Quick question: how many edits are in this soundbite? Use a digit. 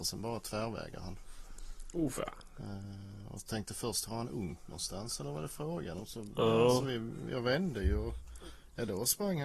0